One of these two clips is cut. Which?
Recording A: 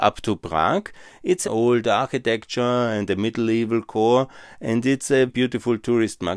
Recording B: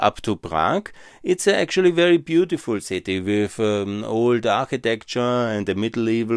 A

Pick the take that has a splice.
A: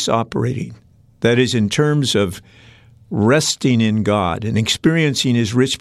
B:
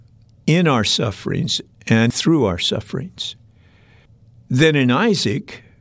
B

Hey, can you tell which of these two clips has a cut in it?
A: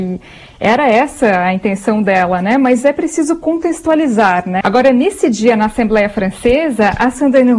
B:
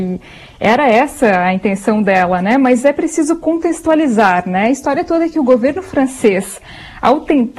A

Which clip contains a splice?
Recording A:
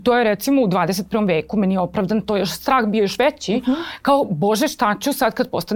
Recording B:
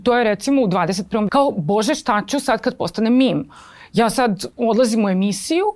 B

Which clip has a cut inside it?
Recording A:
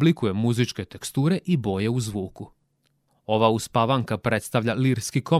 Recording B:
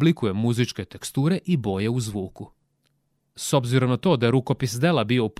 A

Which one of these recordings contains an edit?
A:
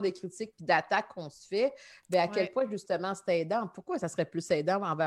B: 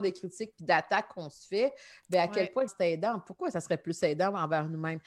B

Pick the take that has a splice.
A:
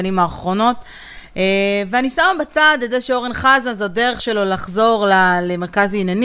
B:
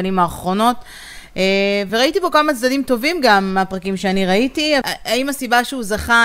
B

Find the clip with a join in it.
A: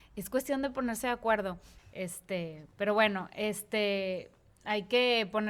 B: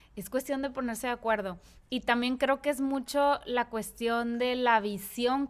A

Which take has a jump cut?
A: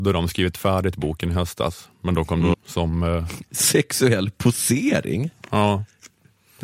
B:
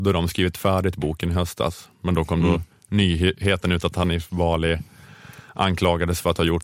A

